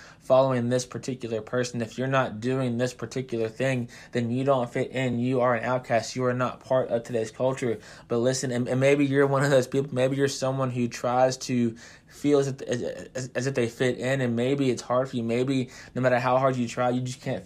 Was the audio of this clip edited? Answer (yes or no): no